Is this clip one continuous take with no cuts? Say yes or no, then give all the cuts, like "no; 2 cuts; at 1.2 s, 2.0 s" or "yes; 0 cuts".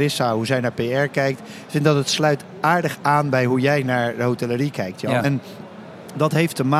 yes; 0 cuts